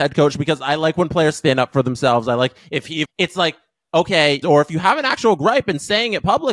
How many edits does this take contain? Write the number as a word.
two